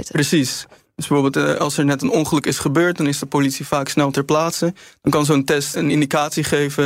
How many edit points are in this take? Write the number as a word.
one